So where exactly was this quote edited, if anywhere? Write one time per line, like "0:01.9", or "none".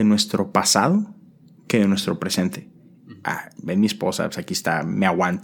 0:03.2